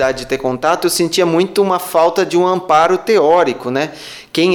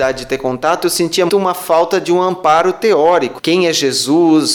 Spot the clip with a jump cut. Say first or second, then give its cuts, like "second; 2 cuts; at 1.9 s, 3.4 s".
second; 2 cuts; at 1.3 s, 3.4 s